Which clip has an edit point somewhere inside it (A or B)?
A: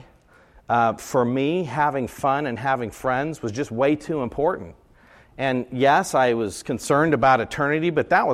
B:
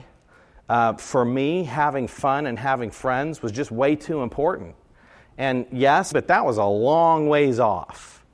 B